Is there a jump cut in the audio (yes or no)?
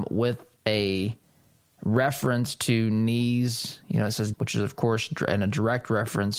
yes